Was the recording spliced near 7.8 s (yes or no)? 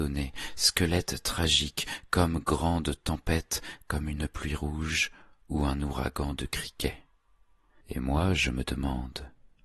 yes